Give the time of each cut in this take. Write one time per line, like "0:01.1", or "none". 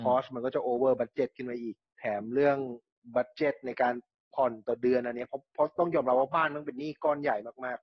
none